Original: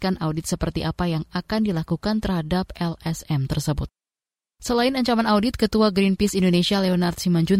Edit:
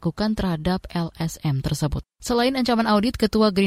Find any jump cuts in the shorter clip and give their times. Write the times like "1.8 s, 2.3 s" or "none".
2.1 s

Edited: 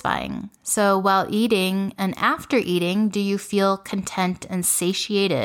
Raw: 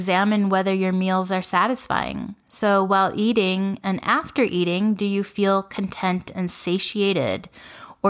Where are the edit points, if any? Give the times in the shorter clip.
none

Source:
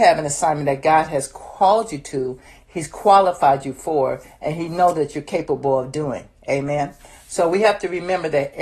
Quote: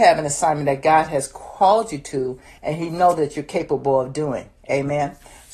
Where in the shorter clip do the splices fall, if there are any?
2.6 s

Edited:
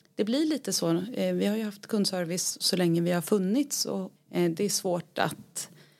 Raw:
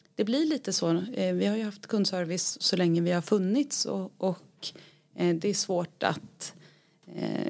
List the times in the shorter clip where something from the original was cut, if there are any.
4.2 s

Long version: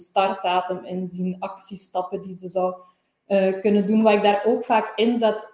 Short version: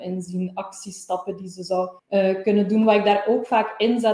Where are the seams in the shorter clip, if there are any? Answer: 2.0 s

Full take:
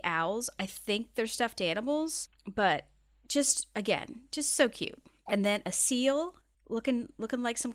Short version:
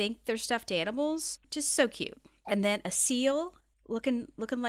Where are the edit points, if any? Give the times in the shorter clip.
1.4 s

